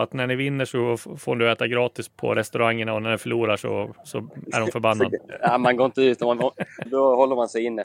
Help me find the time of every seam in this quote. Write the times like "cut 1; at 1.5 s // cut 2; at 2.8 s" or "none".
cut 1; at 2.1 s // cut 2; at 5.2 s // cut 3; at 6.9 s